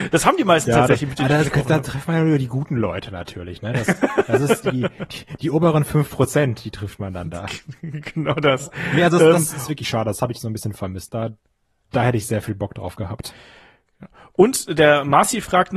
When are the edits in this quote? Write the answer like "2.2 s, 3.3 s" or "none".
none